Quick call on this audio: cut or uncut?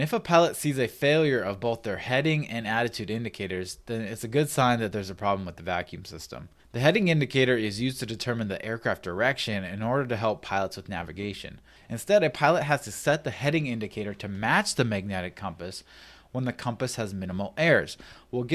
cut